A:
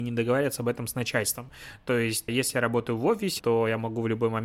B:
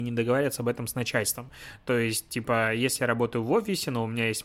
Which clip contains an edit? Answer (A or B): A